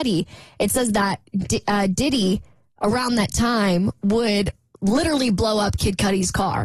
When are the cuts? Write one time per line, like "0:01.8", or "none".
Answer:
none